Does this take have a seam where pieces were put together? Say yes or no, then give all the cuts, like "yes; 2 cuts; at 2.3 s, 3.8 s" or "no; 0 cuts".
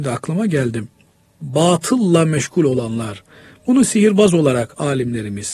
yes; 1 cut; at 1.4 s